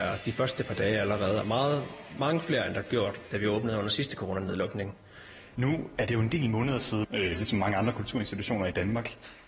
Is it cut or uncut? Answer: cut